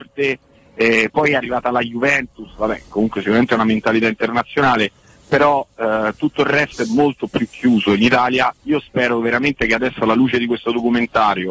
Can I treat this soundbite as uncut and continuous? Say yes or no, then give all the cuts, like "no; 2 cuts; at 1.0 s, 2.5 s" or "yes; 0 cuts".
yes; 0 cuts